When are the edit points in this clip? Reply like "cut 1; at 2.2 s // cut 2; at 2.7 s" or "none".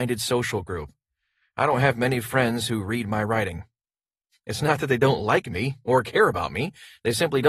none